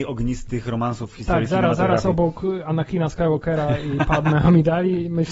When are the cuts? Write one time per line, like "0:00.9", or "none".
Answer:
none